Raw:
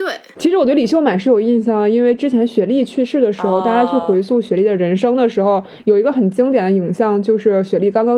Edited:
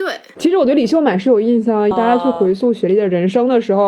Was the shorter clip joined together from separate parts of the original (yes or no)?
yes